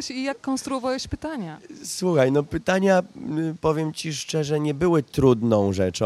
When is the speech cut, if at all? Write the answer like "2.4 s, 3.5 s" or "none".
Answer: none